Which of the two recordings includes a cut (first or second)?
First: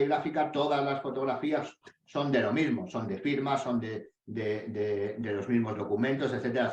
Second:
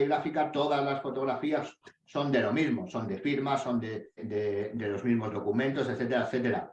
second